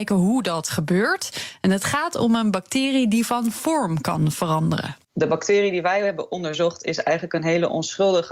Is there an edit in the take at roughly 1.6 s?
no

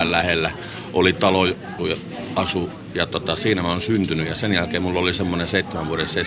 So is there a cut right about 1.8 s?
yes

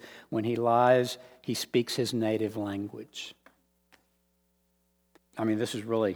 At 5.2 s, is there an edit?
yes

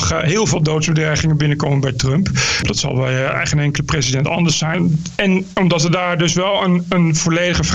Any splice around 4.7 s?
yes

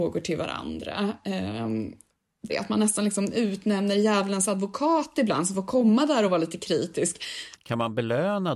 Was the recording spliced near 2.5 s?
yes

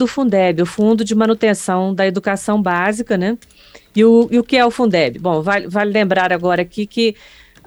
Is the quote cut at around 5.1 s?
no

